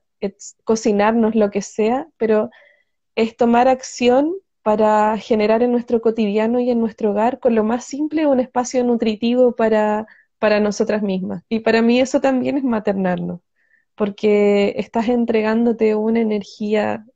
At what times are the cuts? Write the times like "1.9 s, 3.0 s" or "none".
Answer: 11.4 s